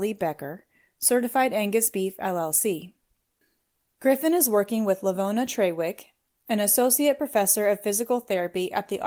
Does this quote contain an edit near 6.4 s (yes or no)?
no